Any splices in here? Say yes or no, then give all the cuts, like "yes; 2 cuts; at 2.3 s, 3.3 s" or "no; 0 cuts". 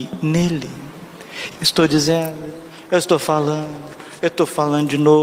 yes; 1 cut; at 1.5 s